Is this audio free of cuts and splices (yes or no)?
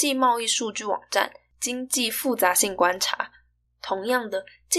no